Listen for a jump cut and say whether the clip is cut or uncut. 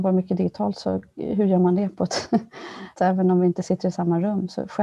cut